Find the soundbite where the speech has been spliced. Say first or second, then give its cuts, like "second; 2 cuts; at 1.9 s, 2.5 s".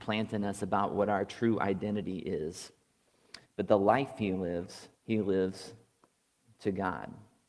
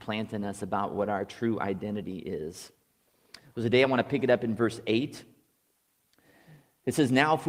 first; 2 cuts; at 3.4 s, 5.0 s